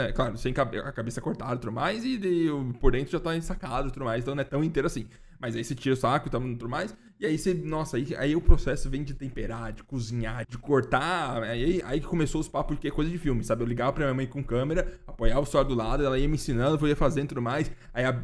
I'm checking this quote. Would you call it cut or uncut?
cut